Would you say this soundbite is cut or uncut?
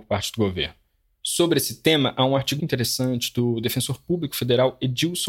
cut